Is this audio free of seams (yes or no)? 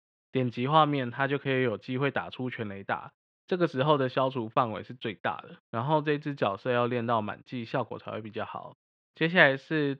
no